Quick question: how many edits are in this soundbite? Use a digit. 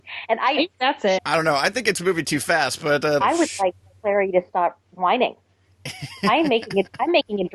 2